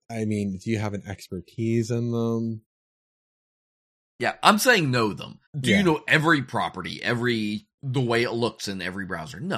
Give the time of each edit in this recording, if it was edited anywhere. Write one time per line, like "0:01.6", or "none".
0:05.5
0:07.8